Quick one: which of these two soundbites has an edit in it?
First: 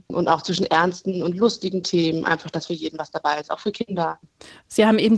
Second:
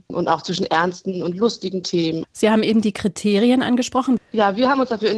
second; 2 cuts; at 2.2 s, 4.2 s

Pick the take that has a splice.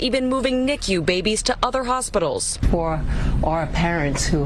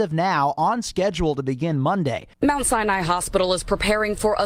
second; 1 cut; at 2.3 s

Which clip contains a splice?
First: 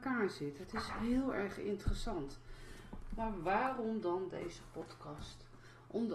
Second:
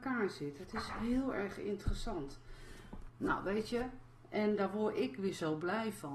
second; 1 cut; at 3.1 s

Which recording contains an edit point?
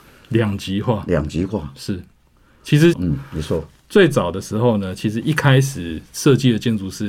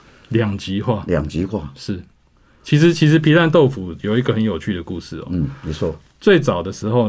first; 1 cut; at 2.9 s

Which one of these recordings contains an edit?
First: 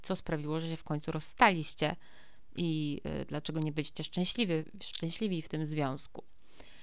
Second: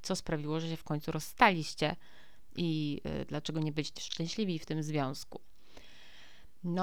second; 1 cut; at 4.0 s

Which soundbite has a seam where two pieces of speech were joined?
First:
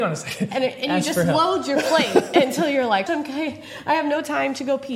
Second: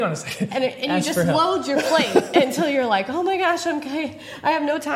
first; 1 cut; at 3.1 s

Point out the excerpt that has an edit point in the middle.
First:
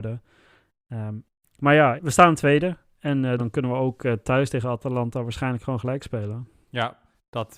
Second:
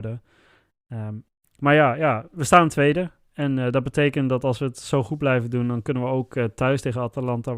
first; 2 cuts; at 2.0 s, 3.4 s

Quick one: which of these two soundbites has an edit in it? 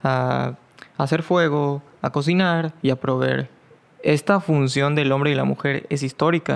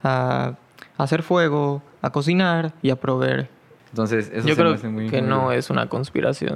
second; 1 cut; at 3.8 s

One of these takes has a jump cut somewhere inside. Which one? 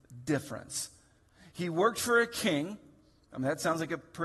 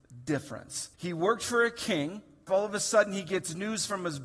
second; 2 cuts; at 0.9 s, 2.5 s

